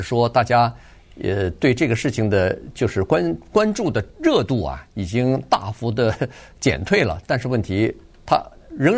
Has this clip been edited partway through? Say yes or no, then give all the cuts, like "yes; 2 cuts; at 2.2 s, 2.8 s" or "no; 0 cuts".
no; 0 cuts